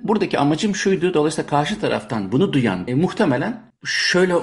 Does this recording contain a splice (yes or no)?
yes